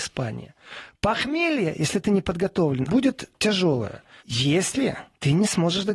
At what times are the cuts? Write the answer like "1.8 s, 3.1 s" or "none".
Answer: 2.9 s, 4.2 s